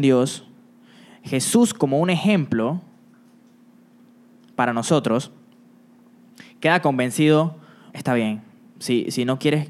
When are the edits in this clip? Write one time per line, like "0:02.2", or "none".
0:07.9